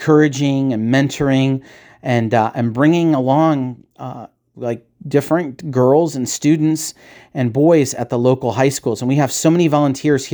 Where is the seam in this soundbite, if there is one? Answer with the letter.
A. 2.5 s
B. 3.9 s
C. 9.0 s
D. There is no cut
D